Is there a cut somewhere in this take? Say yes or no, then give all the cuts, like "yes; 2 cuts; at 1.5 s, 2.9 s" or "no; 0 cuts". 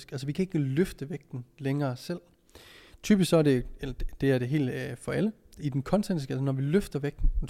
no; 0 cuts